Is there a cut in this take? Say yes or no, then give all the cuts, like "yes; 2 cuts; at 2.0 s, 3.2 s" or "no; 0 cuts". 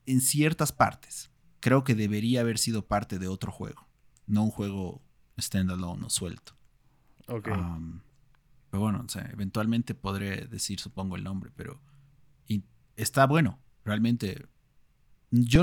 yes; 1 cut; at 1.4 s